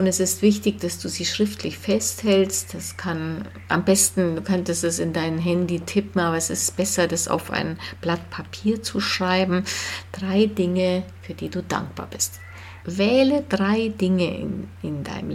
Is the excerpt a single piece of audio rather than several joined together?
no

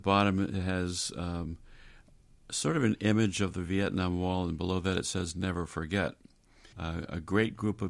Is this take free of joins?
no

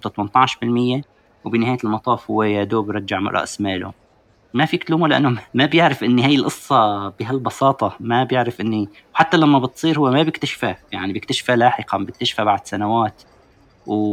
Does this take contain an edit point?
yes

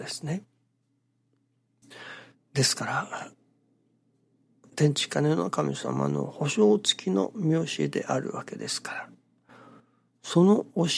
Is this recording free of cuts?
no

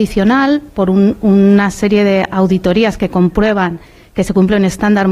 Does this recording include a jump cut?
no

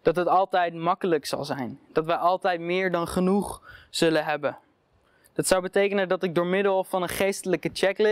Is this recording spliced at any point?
no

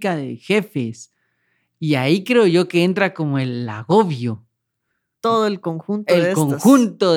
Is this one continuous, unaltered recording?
yes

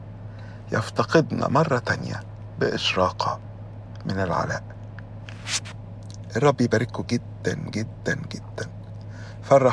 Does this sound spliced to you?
yes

